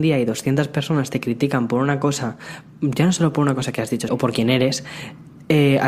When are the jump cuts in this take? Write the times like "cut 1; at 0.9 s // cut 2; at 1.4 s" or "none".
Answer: cut 1; at 4.1 s